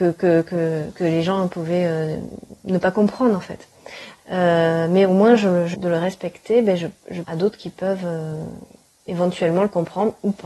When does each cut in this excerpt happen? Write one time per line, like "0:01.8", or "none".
0:04.2
0:05.7
0:07.2